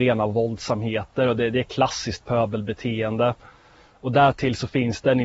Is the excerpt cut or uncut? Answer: uncut